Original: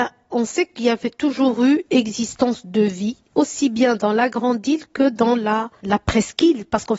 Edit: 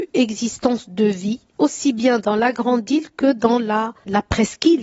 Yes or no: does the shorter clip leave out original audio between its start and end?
no